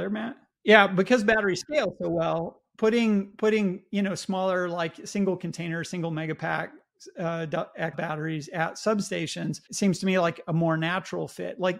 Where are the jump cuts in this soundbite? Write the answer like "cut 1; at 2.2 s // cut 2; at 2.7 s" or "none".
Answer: cut 1; at 7.9 s // cut 2; at 9.7 s